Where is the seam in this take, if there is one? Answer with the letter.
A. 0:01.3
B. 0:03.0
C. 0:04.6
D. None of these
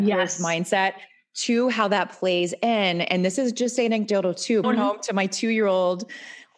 C